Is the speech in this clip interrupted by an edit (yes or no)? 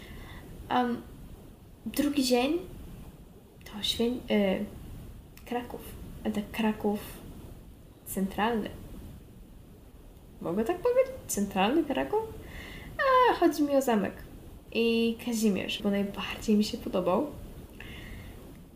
yes